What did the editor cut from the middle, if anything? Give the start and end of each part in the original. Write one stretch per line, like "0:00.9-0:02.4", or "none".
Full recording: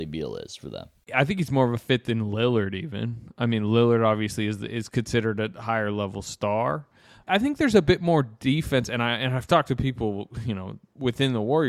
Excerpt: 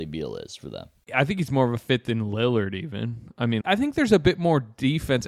0:03.6-0:07.2